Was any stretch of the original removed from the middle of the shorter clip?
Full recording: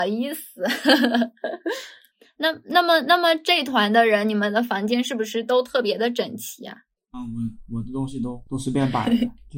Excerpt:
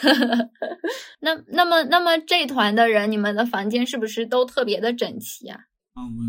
yes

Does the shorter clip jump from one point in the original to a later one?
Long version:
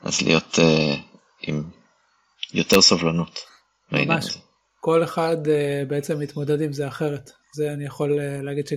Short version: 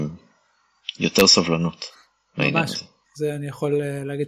yes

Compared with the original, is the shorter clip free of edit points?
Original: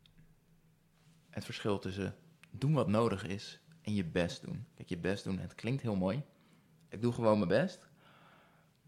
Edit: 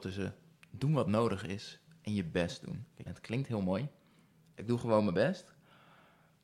no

